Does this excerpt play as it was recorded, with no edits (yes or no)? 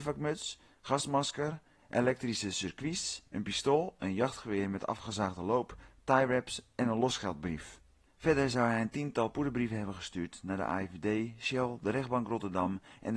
yes